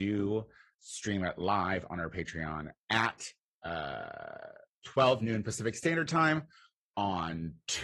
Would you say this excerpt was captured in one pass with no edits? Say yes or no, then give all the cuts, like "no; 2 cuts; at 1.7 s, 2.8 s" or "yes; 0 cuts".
yes; 0 cuts